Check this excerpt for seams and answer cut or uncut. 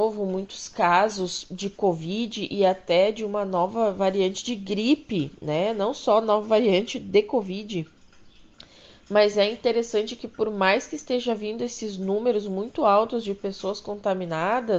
uncut